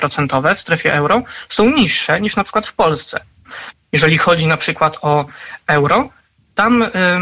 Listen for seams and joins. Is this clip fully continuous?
no; 1 cut; at 3.7 s

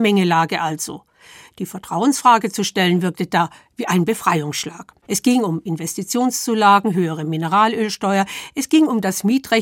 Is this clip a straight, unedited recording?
no; 2 cuts; at 5.0 s, 6.9 s

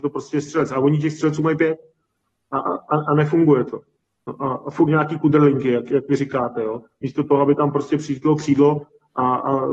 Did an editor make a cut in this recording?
no; 0 cuts

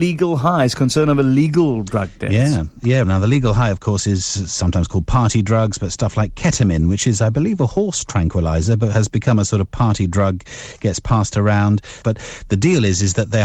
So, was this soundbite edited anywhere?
yes; 2 cuts; at 3.0 s, 12.0 s

